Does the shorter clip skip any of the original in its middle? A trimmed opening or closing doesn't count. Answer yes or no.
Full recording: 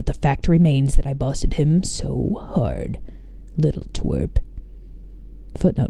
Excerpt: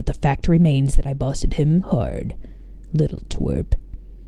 yes